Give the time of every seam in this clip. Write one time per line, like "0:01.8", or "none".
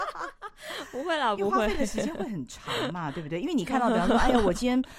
none